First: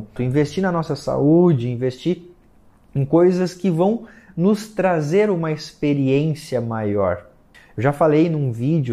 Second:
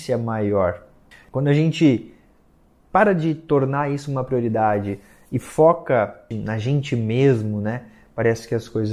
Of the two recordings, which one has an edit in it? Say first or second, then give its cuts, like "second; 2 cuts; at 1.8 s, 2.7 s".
second; 1 cut; at 1.2 s